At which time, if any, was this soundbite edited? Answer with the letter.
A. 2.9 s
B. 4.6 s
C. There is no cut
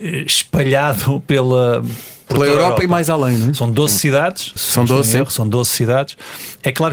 B